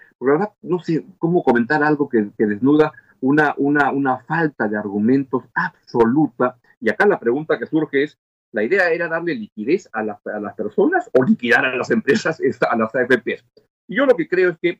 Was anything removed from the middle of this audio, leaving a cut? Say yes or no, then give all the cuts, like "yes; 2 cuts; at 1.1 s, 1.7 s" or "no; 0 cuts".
yes; 1 cut; at 13.7 s